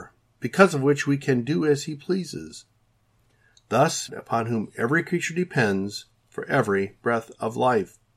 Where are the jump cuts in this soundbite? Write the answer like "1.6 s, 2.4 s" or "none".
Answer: 4.1 s